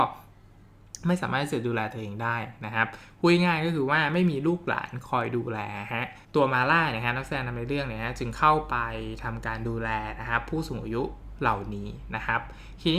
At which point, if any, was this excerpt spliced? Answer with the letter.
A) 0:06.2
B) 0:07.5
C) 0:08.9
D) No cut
A